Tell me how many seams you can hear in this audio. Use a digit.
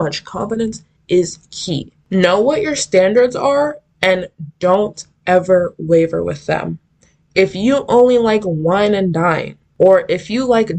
0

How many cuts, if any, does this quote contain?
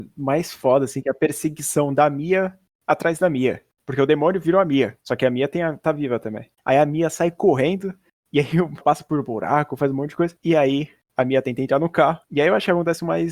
2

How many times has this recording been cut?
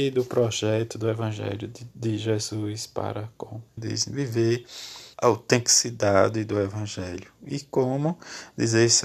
2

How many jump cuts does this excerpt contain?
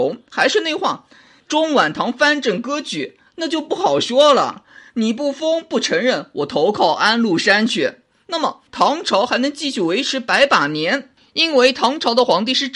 2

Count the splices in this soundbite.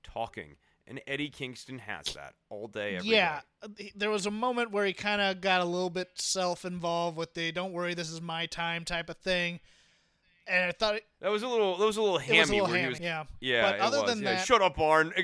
1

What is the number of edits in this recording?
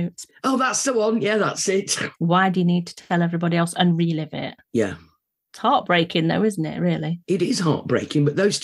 1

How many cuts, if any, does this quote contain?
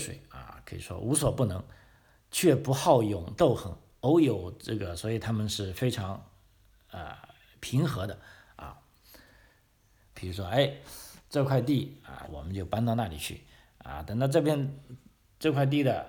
2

